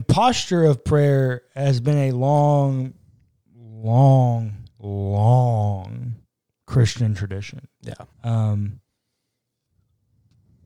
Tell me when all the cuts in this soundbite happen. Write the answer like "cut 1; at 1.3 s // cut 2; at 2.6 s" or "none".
cut 1; at 8.1 s

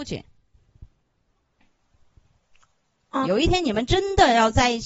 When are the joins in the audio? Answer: cut 1; at 3.2 s

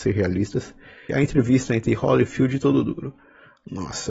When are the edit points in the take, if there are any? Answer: cut 1; at 1.1 s

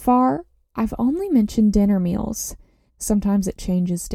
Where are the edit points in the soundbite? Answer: cut 1; at 2.9 s

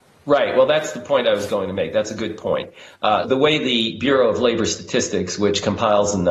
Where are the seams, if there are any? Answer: cut 1; at 3.2 s

